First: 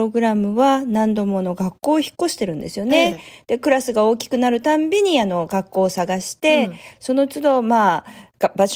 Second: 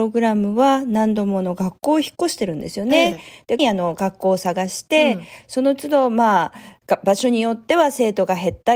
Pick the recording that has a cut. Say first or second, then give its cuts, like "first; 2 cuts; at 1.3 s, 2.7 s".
second; 1 cut; at 3.6 s